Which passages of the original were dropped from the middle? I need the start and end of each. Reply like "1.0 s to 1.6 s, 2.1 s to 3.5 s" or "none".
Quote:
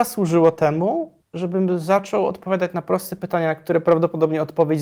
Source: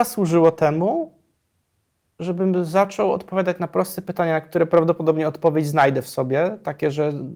1.2 s to 2.1 s